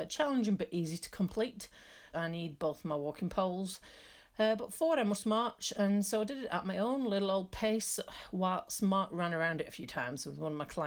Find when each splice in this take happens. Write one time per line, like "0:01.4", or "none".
0:02.1